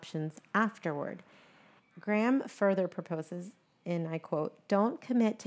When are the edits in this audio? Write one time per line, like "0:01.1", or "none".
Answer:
0:01.8